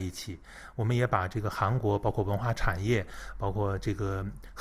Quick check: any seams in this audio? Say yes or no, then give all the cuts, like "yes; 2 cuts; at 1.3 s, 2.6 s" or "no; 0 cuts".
no; 0 cuts